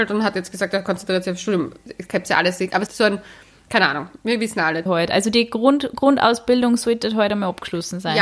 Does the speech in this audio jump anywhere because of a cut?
yes; 2 cuts; at 2.9 s, 4.9 s

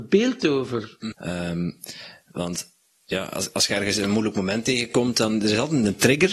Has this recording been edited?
yes; 1 cut; at 1.1 s

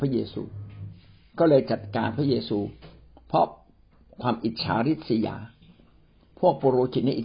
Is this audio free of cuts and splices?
yes; 0 cuts

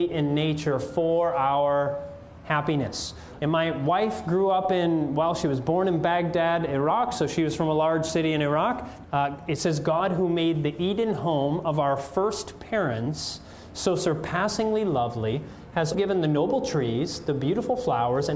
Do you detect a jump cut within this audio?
yes; 3 cuts; at 3.4 s, 9.0 s, 15.9 s

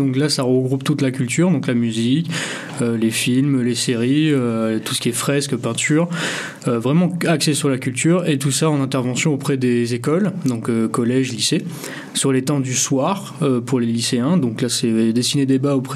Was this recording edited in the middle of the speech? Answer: no; 0 cuts

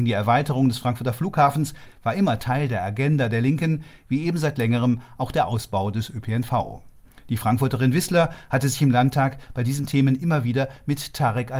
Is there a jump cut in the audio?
no; 0 cuts

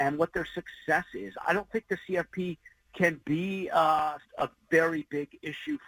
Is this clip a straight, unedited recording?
no; 2 cuts; at 1.4 s, 4.2 s

